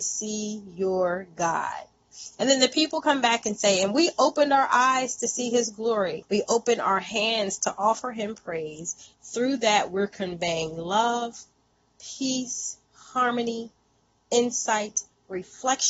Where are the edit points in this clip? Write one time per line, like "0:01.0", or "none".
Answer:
0:06.2
0:09.1
0:12.8